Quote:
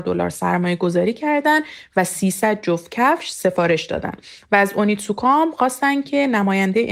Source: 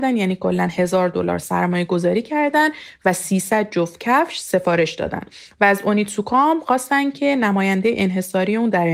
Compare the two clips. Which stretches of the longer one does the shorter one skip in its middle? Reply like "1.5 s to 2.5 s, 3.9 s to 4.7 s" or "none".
none